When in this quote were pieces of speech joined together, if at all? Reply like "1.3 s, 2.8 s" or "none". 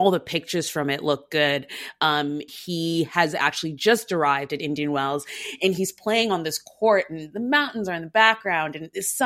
2.5 s